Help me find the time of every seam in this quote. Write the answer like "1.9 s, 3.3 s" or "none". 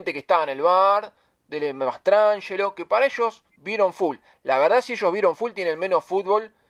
3.5 s